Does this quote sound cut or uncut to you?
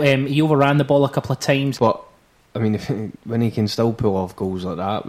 cut